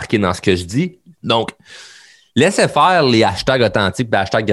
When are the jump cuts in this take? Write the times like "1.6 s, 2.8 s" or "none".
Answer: 1.1 s